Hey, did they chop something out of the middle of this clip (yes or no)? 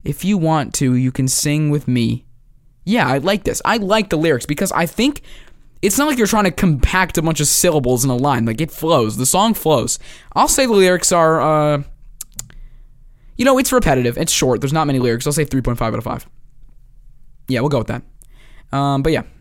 no